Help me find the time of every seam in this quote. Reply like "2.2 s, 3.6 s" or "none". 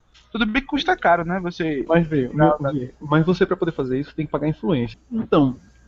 1.9 s, 4.9 s